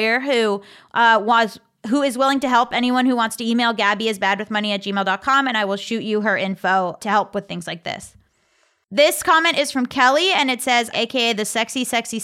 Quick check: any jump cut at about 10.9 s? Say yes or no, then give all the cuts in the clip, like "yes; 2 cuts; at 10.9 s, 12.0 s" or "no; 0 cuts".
yes; 2 cuts; at 7.0 s, 10.9 s